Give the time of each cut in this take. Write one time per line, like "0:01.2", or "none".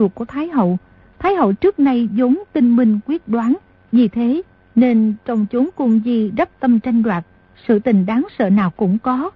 0:03.7